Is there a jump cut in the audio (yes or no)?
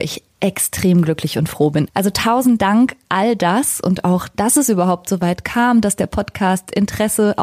yes